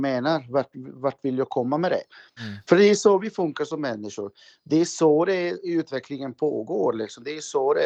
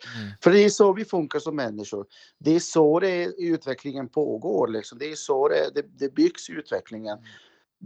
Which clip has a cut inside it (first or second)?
first